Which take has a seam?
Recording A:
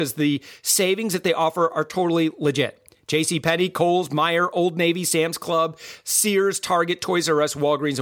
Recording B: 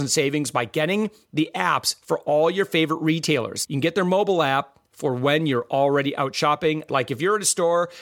B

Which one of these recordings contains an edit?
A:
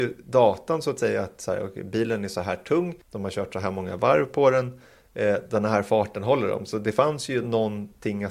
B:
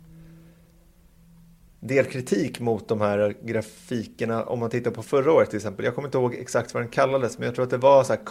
A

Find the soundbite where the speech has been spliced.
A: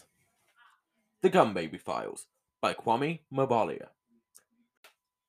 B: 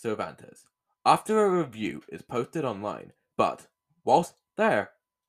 B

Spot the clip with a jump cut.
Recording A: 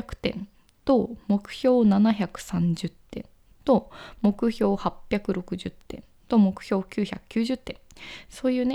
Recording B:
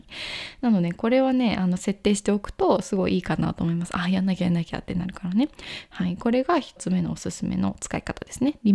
B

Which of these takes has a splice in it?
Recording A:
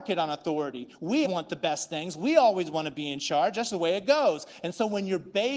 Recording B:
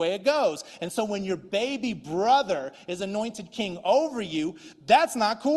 A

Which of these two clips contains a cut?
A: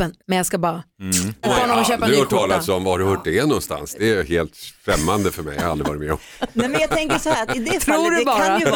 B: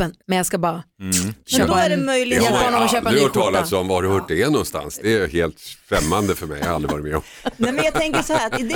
A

